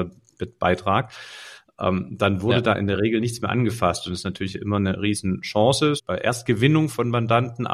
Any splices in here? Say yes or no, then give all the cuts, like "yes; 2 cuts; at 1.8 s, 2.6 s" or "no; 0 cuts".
yes; 1 cut; at 6.0 s